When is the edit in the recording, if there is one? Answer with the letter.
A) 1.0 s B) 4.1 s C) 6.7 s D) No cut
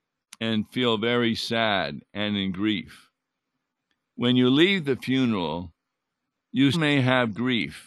C